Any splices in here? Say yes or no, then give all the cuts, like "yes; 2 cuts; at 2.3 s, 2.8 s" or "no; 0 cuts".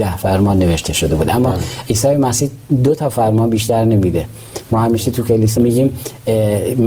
yes; 1 cut; at 5.6 s